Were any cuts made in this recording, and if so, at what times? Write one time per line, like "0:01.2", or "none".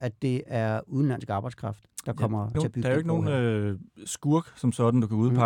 0:02.5